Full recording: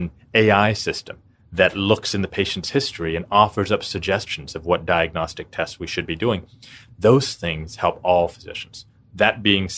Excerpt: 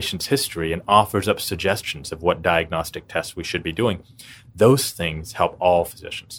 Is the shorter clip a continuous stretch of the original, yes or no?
yes